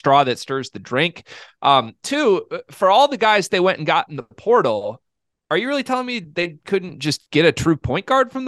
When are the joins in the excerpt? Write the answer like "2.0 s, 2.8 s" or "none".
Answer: none